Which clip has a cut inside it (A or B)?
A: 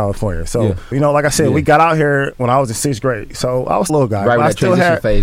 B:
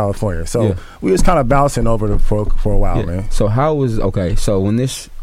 A